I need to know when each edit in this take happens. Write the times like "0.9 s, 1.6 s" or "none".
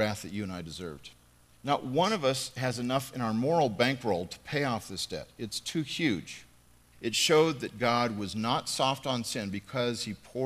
1.5 s, 6.9 s